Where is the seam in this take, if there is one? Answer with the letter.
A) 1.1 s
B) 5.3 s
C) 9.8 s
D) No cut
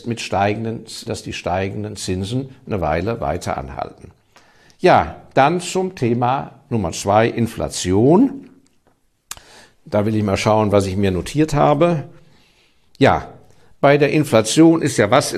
A